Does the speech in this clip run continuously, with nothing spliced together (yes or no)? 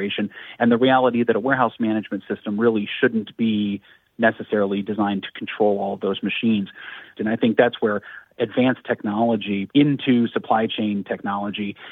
no